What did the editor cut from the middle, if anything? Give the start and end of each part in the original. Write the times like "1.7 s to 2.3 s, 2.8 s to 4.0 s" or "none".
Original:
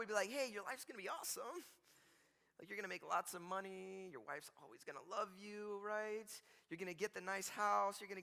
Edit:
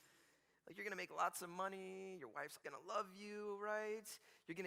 4.5 s to 4.8 s